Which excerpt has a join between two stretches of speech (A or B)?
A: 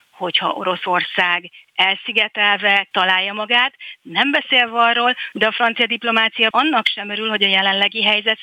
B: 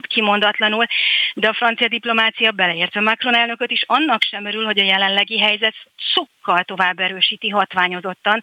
A